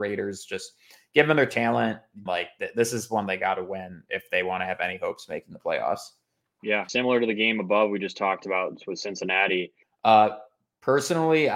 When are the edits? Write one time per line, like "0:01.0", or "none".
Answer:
0:02.3
0:06.9
0:09.8